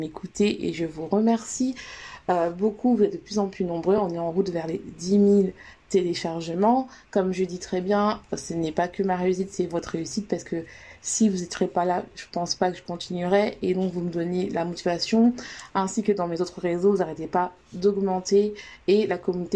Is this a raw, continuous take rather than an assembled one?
yes; 0 cuts

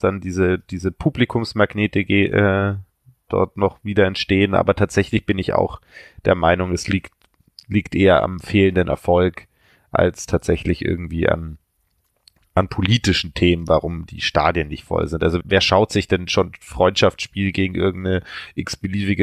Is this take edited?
yes; 2 cuts; at 3.3 s, 15.4 s

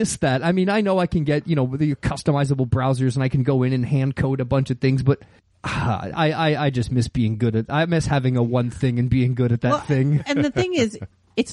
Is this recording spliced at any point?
no; 0 cuts

